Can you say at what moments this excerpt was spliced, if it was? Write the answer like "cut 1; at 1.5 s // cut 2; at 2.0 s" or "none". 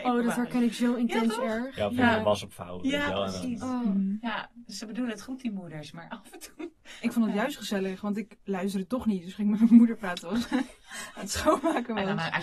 none